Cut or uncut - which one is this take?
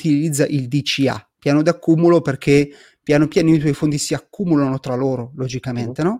uncut